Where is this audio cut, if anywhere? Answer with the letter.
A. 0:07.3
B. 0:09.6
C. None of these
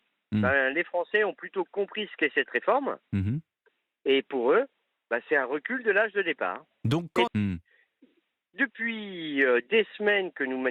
A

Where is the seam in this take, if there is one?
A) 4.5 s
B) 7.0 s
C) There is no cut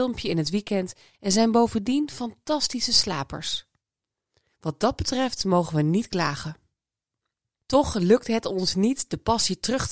A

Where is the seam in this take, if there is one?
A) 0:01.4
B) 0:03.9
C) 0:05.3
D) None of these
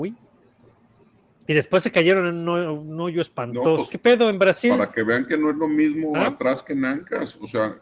B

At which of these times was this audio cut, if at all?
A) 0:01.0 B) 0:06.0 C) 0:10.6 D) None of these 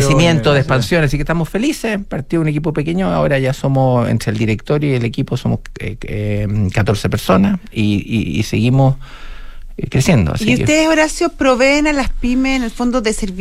D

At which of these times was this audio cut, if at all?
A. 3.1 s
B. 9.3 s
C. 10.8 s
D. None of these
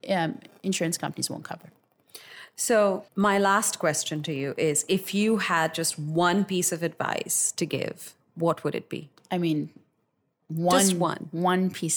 A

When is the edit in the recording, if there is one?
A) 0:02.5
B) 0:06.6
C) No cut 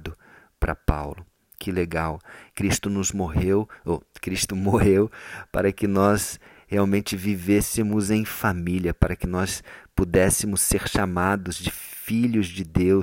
A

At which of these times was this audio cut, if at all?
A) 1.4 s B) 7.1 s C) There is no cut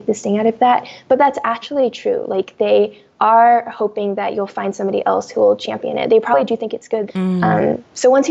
B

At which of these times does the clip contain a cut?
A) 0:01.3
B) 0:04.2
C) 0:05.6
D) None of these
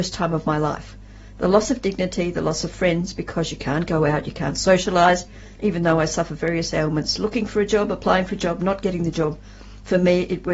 C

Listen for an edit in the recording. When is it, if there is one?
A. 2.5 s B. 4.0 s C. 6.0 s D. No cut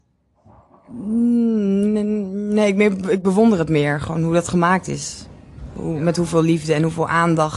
D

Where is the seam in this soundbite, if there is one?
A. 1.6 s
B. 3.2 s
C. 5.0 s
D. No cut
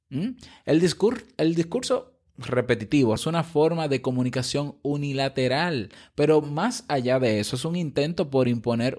B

